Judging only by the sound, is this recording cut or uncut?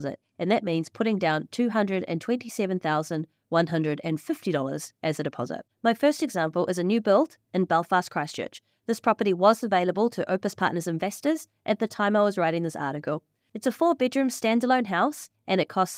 cut